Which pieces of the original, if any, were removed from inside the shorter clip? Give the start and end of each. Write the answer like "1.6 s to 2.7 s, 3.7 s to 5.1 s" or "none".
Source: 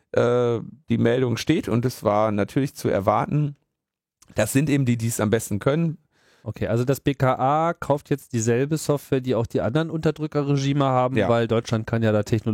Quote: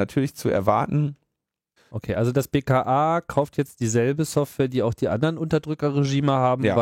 4.2 s to 6.3 s